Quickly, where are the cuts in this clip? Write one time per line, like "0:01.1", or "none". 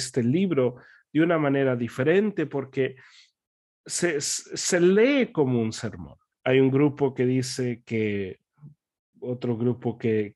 0:06.4
0:09.1